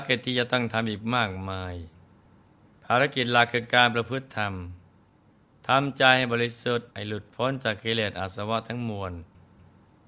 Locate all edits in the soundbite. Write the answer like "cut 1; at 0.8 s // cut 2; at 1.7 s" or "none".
cut 1; at 6.9 s